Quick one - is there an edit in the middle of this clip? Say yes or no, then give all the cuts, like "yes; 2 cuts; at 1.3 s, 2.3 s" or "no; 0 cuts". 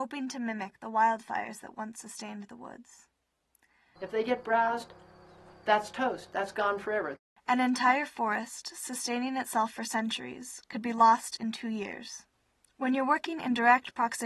yes; 1 cut; at 4.0 s